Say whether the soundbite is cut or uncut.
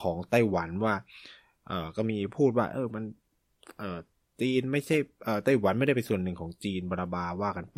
uncut